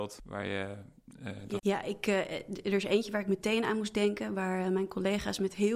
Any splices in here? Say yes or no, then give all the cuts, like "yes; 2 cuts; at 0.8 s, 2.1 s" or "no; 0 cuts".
yes; 1 cut; at 1.6 s